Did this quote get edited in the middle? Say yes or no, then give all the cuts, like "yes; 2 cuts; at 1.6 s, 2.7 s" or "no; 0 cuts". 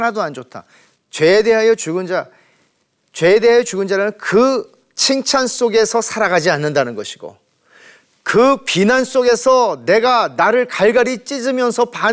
yes; 1 cut; at 1.0 s